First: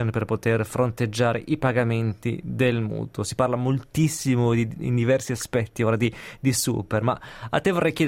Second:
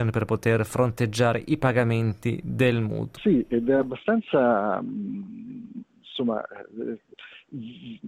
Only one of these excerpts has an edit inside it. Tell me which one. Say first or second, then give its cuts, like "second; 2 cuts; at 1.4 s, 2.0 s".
second; 1 cut; at 3.2 s